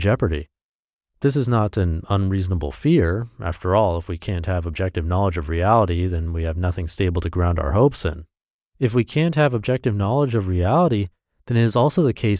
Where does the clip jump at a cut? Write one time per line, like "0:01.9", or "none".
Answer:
0:08.7